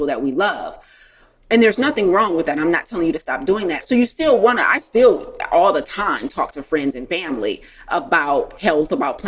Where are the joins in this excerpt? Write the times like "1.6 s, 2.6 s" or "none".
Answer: 3.8 s